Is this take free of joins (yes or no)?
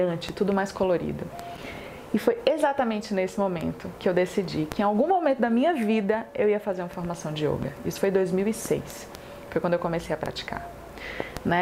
yes